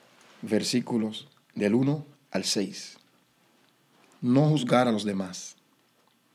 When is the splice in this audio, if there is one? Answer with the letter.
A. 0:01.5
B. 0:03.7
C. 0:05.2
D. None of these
D